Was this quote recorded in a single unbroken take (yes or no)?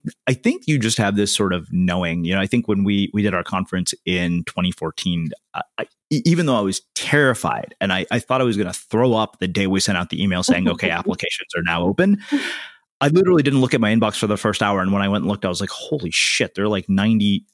yes